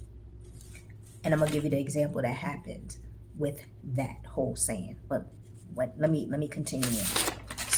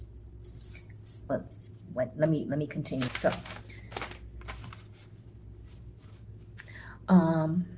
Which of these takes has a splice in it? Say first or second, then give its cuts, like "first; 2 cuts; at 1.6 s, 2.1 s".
second; 2 cuts; at 1.2 s, 3.1 s